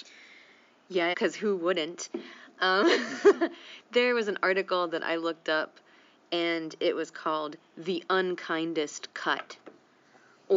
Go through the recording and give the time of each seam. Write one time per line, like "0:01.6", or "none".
0:01.1

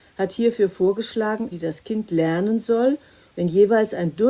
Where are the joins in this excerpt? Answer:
0:01.5
0:03.3

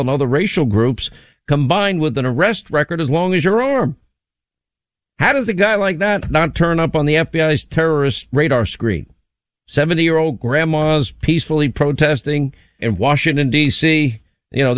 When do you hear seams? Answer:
0:12.8

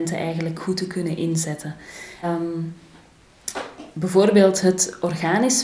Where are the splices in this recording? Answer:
0:02.2

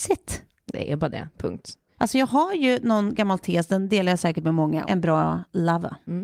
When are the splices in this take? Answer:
0:04.8

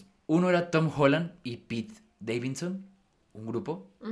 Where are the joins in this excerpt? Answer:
none

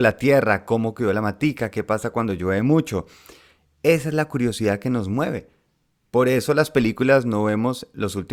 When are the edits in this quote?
none

